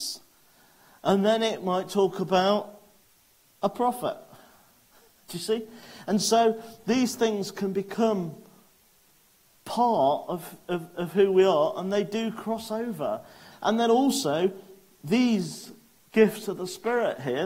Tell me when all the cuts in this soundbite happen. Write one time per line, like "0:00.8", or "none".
0:13.5